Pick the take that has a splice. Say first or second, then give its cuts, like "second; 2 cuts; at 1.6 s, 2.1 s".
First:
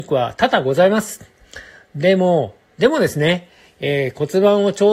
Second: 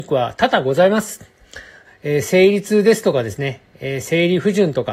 second; 1 cut; at 1.8 s